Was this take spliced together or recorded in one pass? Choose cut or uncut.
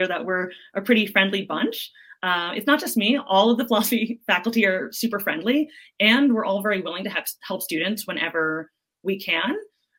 uncut